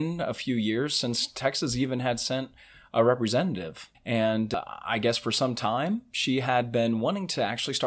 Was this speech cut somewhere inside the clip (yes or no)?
yes